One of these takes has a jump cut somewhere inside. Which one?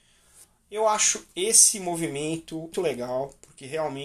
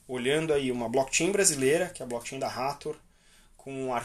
first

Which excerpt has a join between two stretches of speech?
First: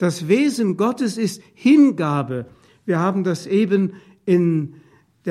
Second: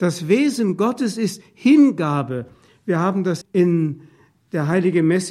second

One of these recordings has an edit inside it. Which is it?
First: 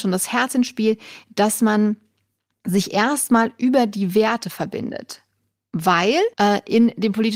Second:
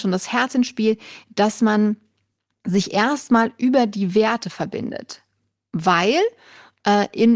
first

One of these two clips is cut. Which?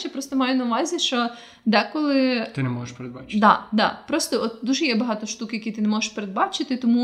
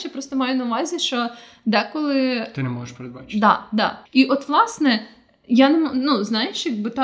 second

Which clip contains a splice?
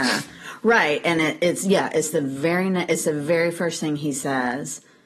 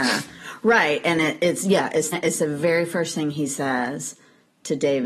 second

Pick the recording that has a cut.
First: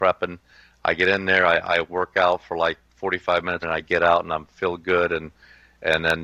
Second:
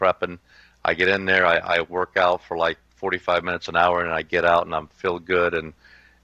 first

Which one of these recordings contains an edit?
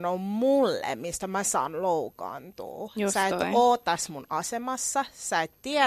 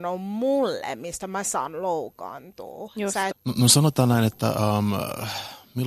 second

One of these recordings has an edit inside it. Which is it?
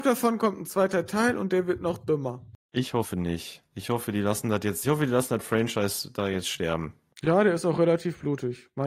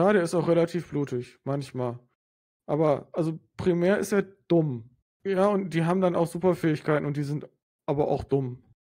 first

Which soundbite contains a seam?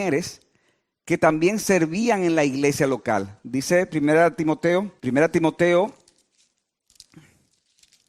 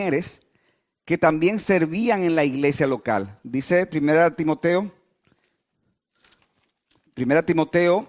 first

